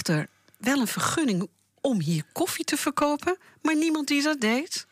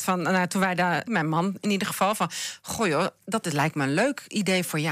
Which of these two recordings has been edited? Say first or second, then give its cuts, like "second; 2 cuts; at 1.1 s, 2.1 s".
second; 2 cuts; at 1.1 s, 3.2 s